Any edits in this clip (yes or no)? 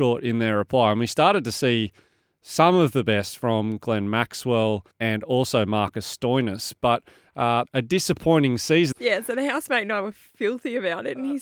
yes